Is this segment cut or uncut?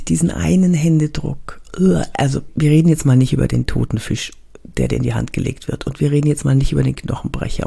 cut